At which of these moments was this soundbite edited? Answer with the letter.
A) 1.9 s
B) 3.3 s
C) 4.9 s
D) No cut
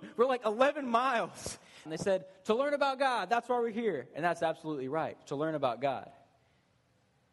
A